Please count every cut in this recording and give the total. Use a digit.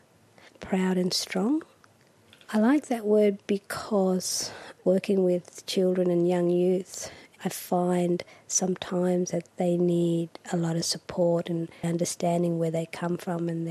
2